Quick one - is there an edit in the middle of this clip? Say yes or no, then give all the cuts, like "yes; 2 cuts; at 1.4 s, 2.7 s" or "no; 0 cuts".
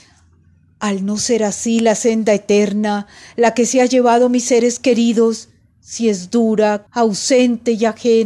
yes; 1 cut; at 6.9 s